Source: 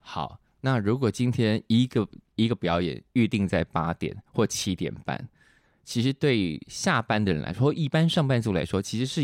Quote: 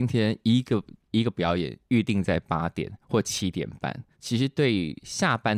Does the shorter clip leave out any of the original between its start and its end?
yes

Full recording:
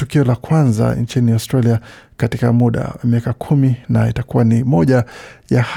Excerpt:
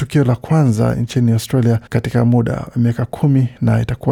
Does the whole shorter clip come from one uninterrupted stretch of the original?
no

